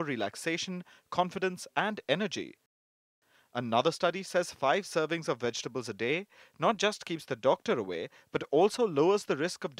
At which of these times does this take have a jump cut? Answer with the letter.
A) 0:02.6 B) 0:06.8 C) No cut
C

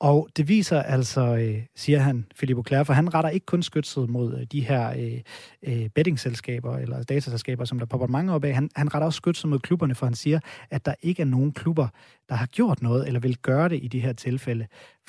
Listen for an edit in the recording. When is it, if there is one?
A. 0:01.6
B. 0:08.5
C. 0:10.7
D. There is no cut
D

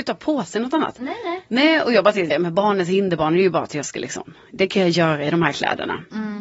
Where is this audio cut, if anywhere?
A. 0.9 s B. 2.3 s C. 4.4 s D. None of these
B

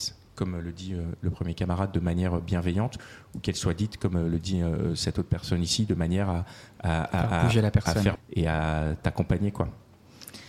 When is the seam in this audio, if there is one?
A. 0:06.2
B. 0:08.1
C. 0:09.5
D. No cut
B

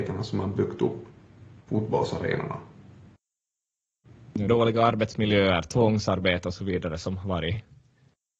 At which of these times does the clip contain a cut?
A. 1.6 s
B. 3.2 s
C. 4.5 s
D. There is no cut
C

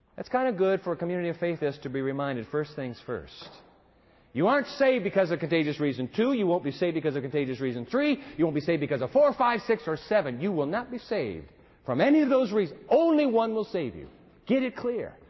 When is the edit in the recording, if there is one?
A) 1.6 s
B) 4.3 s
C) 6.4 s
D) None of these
A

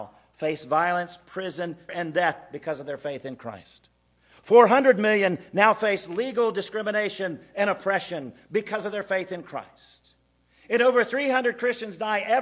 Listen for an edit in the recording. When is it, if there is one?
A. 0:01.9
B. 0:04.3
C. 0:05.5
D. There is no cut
A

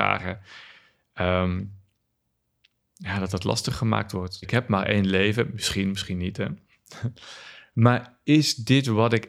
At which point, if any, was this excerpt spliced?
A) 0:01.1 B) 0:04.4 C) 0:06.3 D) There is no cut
B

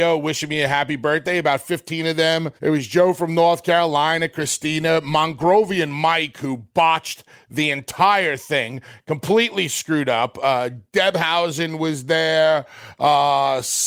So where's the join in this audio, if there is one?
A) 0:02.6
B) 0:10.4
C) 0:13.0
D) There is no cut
A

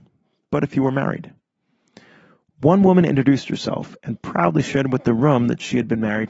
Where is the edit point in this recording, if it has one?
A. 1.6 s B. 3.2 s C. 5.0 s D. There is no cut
D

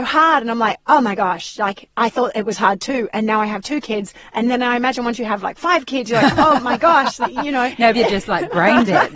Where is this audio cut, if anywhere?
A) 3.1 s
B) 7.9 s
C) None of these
B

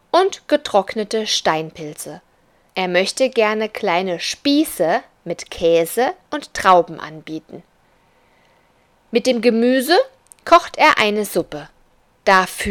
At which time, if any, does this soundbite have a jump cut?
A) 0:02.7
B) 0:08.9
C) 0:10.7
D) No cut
A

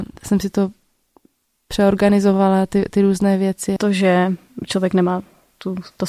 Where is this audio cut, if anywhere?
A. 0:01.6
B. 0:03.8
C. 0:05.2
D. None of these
B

